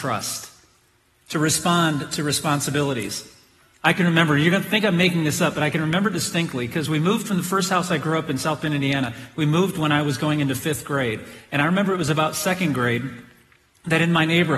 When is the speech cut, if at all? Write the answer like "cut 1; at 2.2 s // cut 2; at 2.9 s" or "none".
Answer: none